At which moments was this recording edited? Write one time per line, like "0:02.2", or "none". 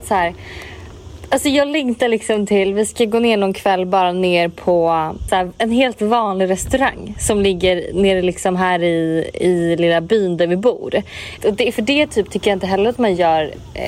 0:05.3
0:11.4